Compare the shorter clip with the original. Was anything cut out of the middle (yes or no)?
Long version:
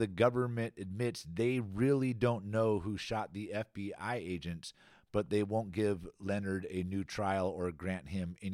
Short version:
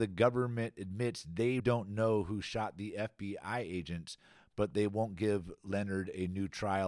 yes